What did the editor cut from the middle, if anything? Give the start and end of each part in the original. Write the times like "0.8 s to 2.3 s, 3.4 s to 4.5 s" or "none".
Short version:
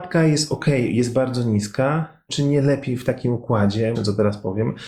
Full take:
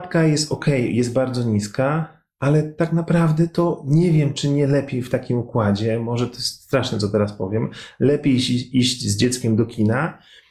2.3 s to 4.3 s, 6.0 s to 6.9 s